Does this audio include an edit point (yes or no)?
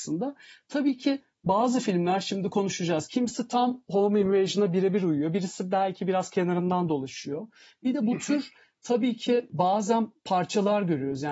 no